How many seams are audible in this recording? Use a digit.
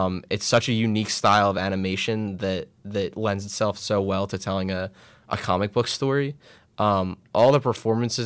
0